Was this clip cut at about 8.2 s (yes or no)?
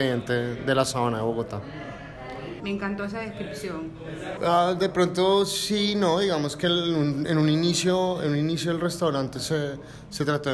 no